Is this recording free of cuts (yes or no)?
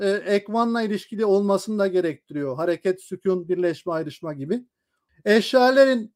no